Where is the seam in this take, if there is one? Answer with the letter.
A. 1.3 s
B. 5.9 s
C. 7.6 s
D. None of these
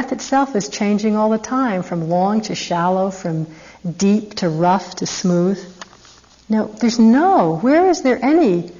D